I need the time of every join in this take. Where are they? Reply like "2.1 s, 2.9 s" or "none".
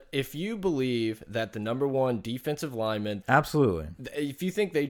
3.2 s

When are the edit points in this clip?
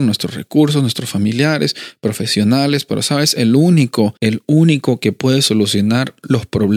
4.2 s

